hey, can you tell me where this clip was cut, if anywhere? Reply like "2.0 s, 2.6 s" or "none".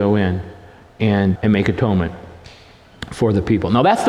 1.4 s